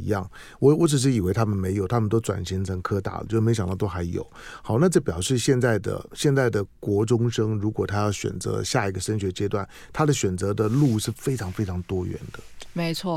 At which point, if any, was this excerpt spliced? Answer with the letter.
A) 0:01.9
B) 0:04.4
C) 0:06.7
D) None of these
C